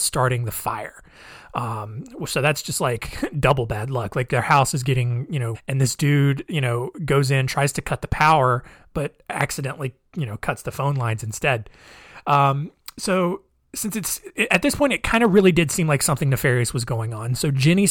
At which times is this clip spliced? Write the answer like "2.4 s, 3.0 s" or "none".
5.5 s